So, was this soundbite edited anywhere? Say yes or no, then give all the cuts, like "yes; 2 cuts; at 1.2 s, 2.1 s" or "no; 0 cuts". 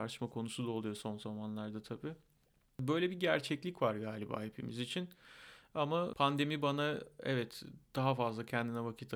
no; 0 cuts